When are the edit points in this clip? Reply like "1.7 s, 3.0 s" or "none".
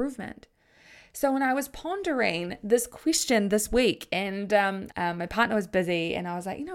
4.9 s